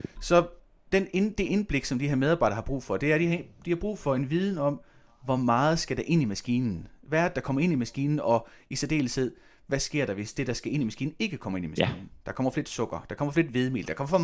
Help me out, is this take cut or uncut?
uncut